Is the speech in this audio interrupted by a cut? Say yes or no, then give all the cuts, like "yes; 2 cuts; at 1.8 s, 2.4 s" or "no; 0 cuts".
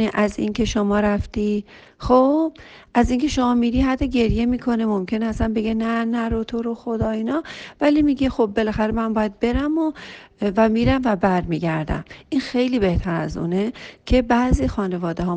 no; 0 cuts